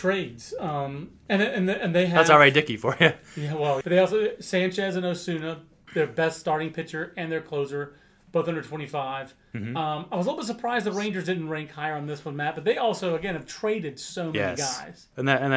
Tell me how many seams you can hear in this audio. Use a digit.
1